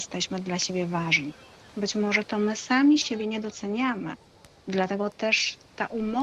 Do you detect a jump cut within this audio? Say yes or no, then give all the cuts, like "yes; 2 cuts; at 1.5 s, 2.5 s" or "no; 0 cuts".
no; 0 cuts